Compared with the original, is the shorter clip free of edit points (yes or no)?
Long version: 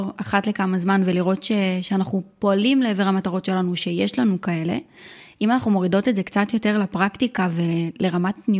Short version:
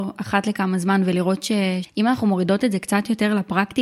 no